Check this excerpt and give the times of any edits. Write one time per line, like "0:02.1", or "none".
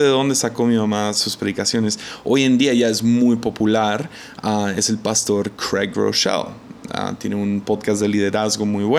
none